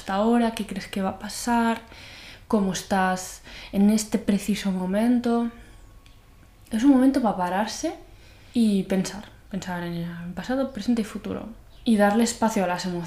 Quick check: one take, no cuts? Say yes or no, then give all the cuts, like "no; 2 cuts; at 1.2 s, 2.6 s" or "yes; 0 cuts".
yes; 0 cuts